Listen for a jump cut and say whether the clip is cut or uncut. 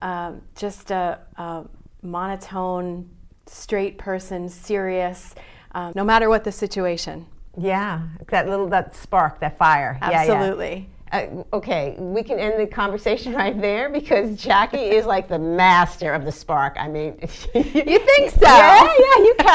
cut